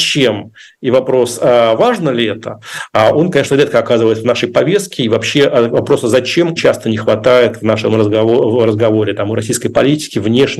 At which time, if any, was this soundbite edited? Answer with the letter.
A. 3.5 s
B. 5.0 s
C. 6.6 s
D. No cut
C